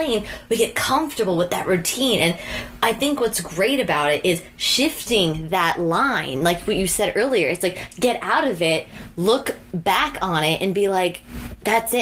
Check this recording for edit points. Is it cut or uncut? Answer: uncut